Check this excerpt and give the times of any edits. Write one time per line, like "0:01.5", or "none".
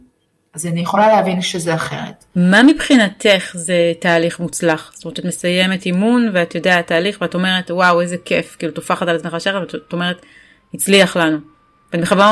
none